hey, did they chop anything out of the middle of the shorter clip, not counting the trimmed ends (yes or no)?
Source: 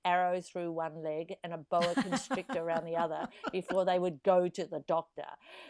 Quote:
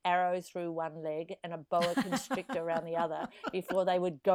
no